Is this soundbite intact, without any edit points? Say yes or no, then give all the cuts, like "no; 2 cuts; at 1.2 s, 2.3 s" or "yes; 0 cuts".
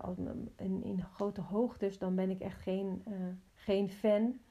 no; 1 cut; at 3.5 s